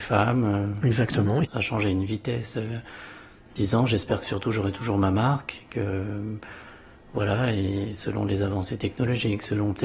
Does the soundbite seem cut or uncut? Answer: cut